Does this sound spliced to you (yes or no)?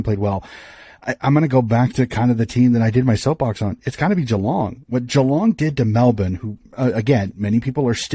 no